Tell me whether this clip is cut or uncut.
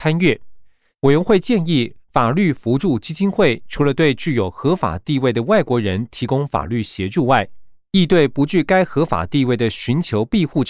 cut